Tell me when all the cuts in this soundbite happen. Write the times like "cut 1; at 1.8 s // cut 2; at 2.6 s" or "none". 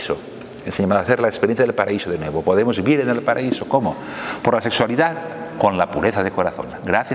none